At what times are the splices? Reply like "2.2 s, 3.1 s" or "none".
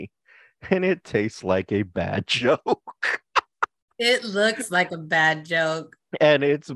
none